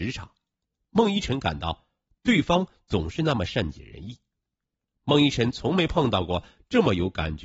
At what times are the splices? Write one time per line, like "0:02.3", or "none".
none

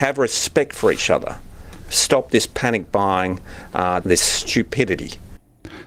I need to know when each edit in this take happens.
0:04.0

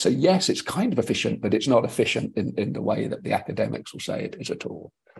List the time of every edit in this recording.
none

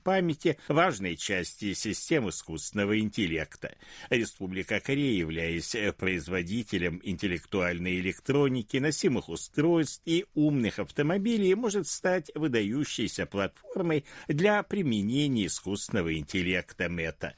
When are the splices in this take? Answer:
none

